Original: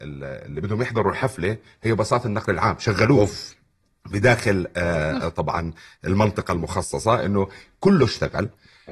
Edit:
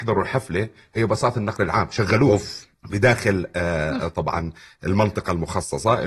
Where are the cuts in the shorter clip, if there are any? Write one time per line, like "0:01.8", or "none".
0:02.7